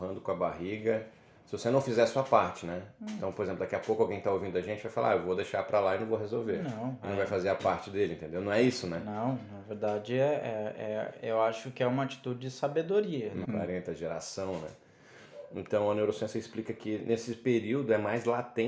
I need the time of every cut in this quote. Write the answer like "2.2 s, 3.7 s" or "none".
13.4 s